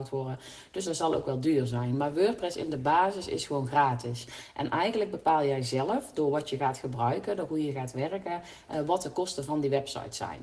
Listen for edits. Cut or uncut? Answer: uncut